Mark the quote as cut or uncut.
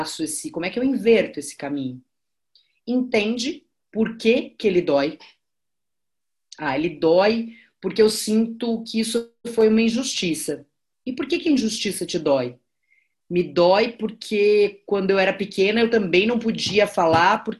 uncut